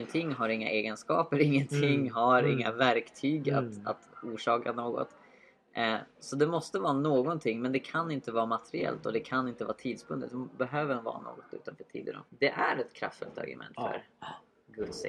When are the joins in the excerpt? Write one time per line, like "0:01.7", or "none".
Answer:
0:12.3